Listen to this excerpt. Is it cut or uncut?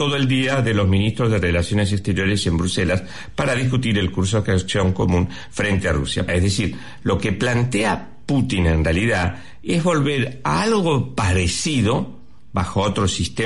cut